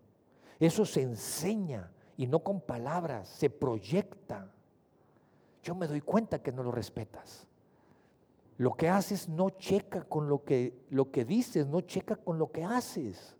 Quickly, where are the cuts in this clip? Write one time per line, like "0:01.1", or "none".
0:05.6
0:08.5